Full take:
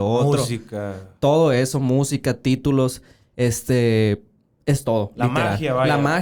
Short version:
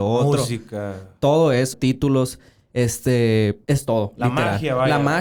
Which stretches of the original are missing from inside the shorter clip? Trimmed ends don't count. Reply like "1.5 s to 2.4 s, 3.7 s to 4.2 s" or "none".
1.7 s to 2.4 s, 4.3 s to 4.6 s